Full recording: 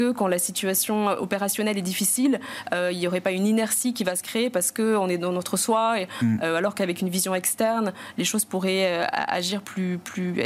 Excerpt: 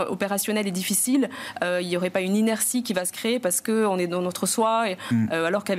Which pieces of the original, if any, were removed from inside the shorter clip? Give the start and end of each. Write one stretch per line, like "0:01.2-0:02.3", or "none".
none